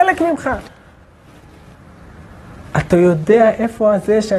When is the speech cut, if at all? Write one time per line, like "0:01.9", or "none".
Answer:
none